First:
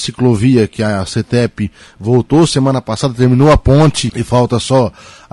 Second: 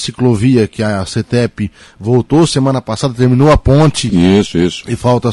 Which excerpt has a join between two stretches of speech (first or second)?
first